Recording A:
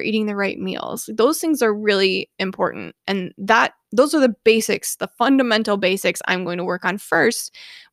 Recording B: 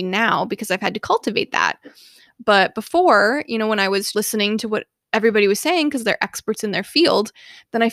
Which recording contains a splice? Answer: B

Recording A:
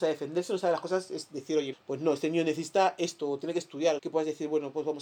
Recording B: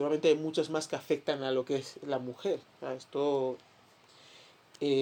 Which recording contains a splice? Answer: A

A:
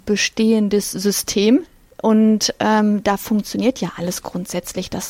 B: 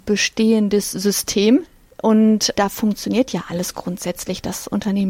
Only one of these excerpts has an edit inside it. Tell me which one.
B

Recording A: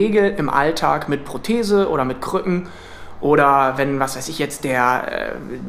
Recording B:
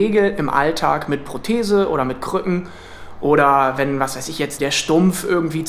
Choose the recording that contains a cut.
B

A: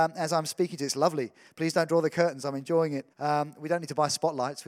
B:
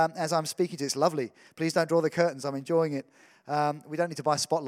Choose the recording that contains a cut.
A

